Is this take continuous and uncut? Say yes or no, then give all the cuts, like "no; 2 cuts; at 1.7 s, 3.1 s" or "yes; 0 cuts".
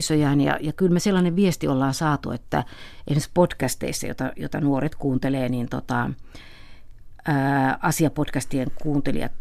yes; 0 cuts